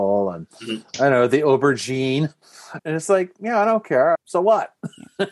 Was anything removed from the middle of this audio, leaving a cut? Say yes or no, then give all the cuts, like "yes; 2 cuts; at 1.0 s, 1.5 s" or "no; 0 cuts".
yes; 2 cuts; at 2.8 s, 4.2 s